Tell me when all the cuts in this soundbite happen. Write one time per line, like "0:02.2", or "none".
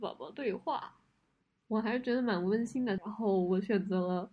0:03.0